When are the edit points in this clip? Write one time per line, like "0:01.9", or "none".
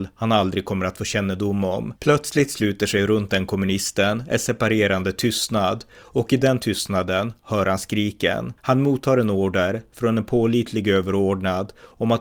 0:02.0
0:08.6